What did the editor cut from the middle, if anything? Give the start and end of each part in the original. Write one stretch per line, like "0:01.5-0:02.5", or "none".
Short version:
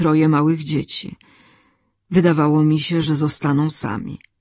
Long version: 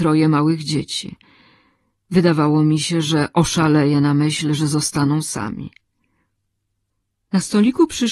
0:03.0-0:04.6